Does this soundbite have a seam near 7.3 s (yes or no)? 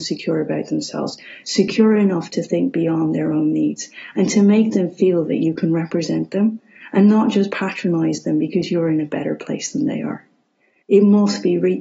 no